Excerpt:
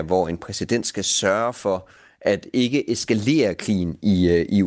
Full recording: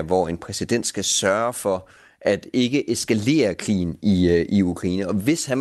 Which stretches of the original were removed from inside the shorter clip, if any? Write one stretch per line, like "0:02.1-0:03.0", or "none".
none